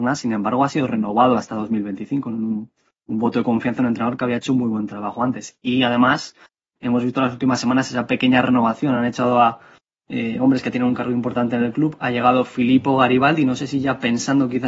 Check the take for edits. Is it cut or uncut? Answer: uncut